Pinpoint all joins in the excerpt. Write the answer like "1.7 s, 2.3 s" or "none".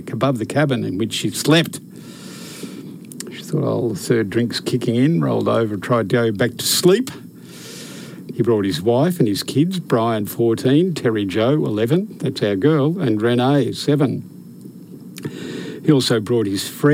8.3 s